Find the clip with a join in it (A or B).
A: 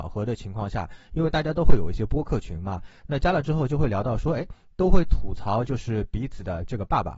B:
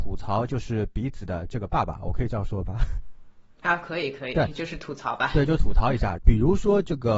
B